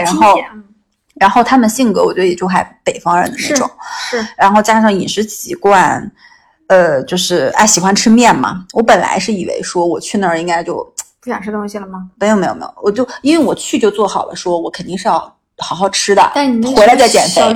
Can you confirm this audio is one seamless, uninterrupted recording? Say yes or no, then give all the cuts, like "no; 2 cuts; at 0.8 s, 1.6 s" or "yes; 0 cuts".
yes; 0 cuts